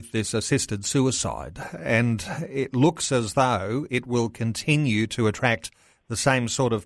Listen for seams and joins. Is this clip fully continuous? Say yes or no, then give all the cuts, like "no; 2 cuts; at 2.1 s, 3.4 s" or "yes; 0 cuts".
yes; 0 cuts